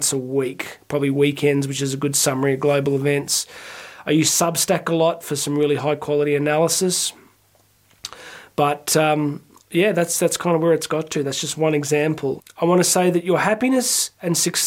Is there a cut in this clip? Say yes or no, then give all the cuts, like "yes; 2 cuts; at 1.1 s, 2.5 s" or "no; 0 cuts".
yes; 1 cut; at 12.4 s